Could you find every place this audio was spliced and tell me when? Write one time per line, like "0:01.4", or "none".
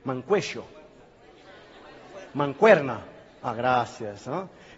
0:02.2